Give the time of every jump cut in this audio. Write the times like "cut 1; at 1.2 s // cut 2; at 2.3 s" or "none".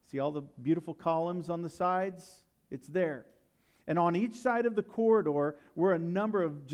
none